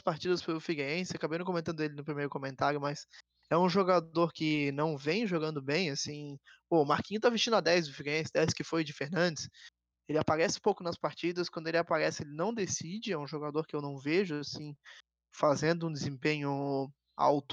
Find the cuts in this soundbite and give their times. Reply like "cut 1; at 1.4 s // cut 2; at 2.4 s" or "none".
cut 1; at 9.9 s